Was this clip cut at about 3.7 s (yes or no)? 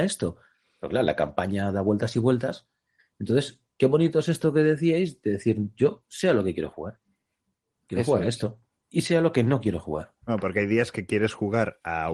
no